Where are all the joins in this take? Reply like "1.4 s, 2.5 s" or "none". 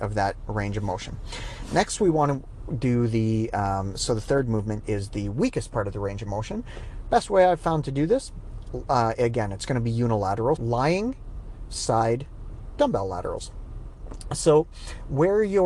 10.6 s